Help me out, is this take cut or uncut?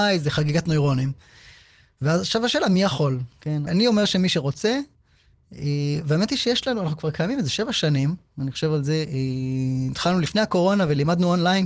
cut